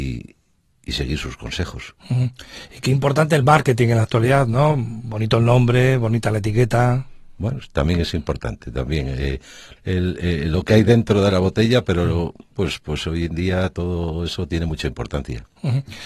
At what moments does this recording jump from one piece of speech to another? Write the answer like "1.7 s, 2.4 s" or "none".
9.8 s, 12.5 s